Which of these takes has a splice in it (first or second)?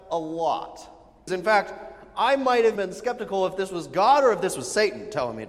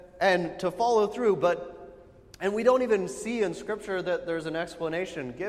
first